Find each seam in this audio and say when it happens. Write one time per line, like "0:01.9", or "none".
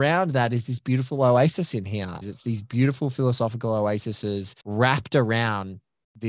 0:02.2
0:04.6